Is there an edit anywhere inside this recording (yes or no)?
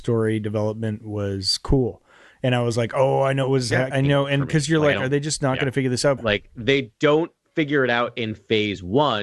yes